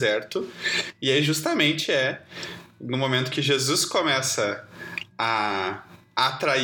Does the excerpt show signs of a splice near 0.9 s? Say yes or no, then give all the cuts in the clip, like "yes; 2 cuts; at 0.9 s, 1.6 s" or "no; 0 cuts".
no; 0 cuts